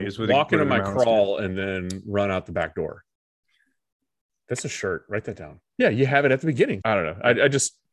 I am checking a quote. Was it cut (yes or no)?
yes